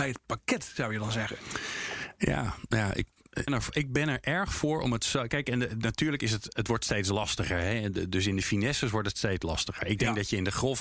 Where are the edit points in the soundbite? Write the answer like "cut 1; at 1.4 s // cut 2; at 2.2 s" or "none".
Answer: cut 1; at 3.5 s